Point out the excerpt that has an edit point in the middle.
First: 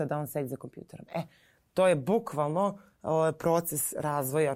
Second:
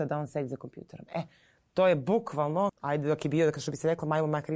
second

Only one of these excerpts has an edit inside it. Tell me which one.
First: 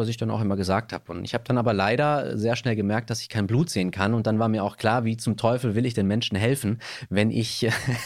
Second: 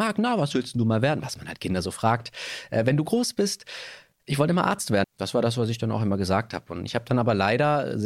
second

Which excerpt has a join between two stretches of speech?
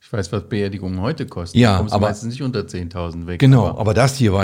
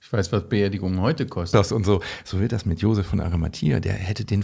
second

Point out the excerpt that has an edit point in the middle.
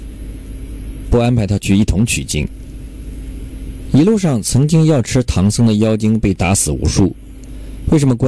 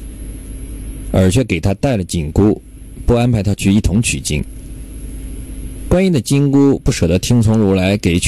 first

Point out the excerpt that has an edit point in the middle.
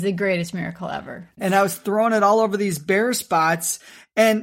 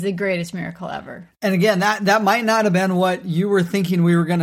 first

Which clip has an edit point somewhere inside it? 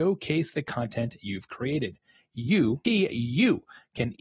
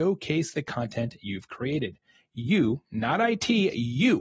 first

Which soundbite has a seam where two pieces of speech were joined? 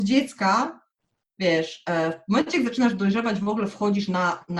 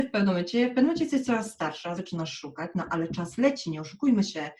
second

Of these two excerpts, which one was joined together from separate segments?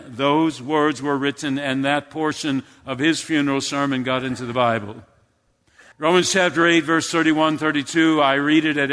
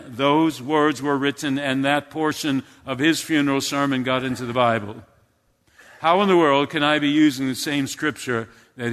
first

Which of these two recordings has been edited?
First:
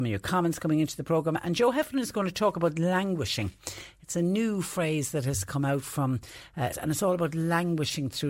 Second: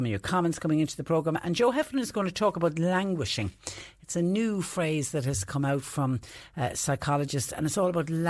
first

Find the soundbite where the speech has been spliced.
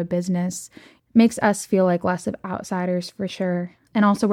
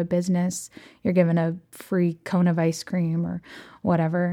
first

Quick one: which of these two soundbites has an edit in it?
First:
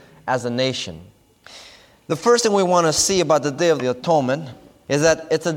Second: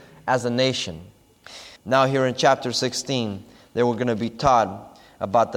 second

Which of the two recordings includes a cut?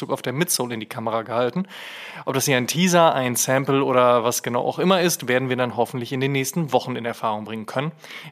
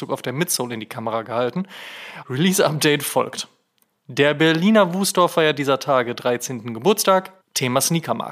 second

